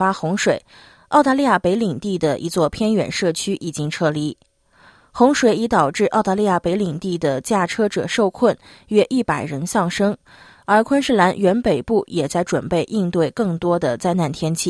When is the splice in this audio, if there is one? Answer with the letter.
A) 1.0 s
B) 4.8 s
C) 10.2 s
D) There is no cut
D